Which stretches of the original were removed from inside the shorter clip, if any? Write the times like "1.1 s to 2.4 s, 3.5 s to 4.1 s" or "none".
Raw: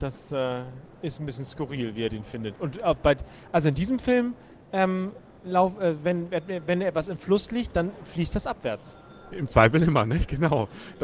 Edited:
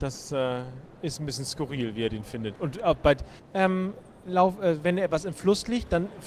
3.4 s to 4.6 s, 6.0 s to 6.7 s